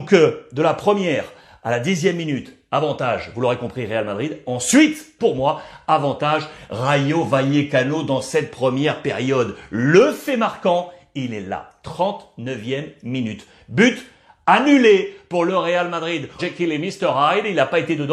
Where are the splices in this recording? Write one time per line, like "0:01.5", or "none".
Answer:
0:05.2
0:16.4